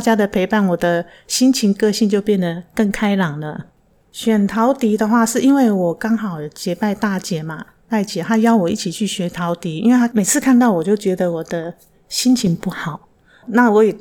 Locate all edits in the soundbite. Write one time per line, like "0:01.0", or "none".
0:04.0